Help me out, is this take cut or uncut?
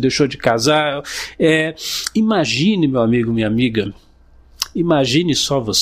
uncut